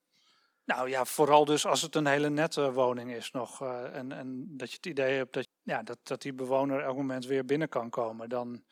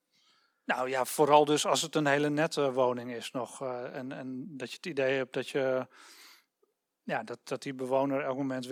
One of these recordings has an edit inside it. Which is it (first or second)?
first